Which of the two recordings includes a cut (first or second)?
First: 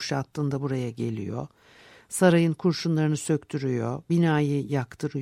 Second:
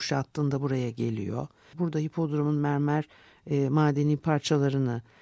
second